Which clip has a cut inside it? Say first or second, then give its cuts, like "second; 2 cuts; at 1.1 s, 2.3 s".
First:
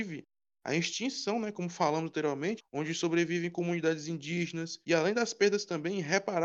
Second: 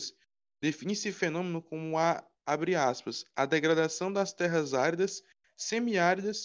first; 2 cuts; at 2.6 s, 4.8 s